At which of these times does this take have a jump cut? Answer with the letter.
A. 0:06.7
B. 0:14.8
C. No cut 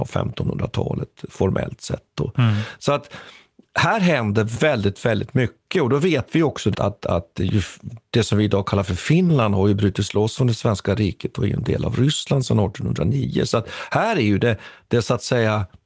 A